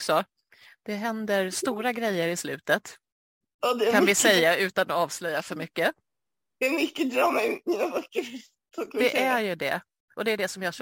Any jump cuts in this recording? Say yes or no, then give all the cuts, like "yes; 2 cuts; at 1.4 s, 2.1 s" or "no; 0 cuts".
no; 0 cuts